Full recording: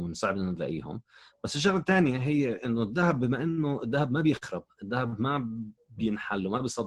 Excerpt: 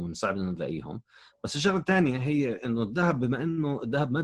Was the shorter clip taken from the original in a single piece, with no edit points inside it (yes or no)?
yes